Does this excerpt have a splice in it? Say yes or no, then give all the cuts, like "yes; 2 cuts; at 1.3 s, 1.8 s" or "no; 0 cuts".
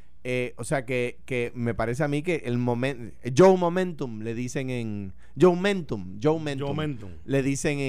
no; 0 cuts